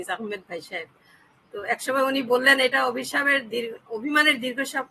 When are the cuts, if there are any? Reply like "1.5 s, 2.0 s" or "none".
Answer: 3.9 s